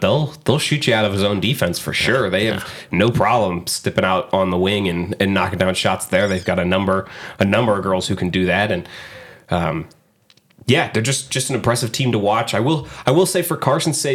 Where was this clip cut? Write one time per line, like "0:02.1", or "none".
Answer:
none

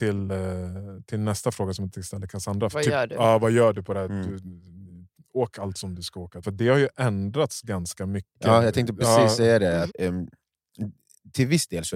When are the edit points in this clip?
0:02.7
0:06.4
0:09.9

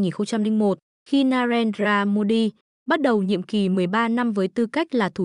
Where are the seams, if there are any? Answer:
0:02.7

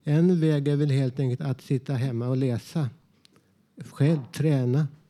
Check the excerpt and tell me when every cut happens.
0:01.4

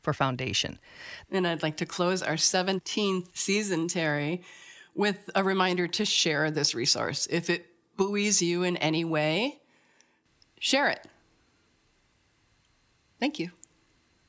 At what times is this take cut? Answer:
0:01.2

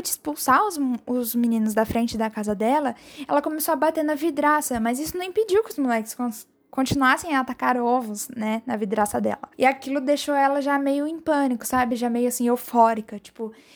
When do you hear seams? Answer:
0:09.5

